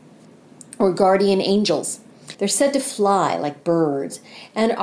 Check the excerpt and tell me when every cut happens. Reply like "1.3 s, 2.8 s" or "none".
2.3 s